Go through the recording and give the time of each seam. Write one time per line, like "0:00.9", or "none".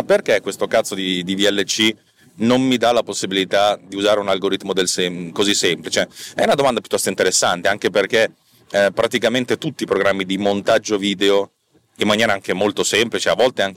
none

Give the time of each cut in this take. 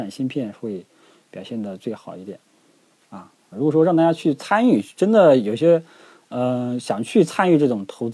0:03.5

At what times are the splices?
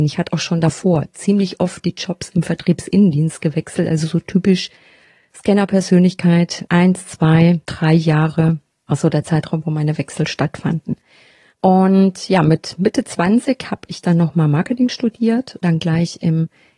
0:11.5
0:15.6

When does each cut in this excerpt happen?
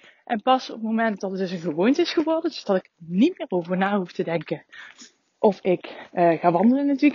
none

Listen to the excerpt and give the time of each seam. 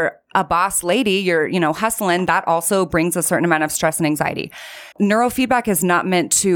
0:04.9

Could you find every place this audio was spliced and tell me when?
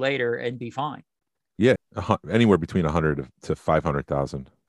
0:01.8

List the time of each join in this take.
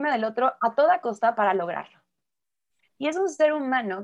0:02.8

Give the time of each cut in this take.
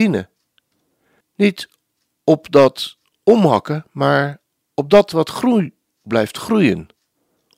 0:01.2

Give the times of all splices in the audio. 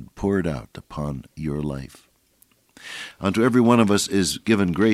0:03.1

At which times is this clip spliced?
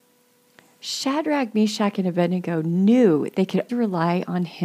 0:03.7

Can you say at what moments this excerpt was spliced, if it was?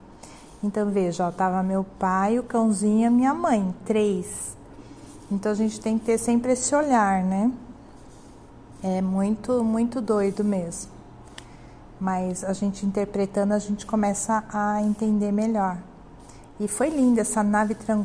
none

